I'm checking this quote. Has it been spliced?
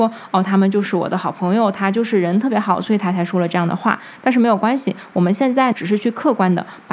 no; 0 cuts

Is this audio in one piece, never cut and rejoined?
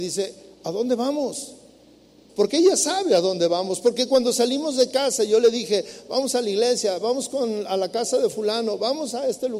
no; 1 cut; at 2.3 s

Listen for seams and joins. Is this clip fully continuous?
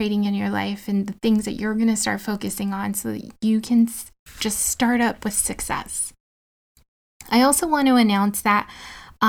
yes; 0 cuts

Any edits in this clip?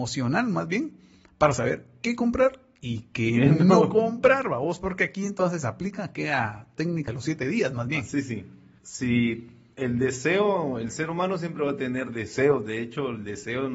no; 0 cuts

